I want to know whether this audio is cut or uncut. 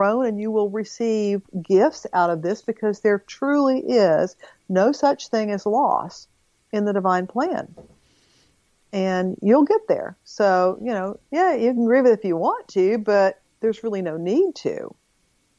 cut